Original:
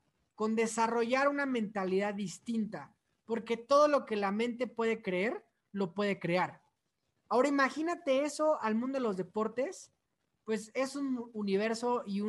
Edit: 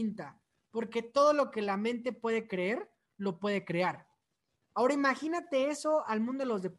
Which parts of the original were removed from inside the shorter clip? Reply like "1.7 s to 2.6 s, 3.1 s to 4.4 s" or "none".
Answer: none